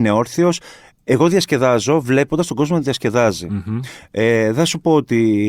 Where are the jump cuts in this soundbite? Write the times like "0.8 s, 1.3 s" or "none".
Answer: none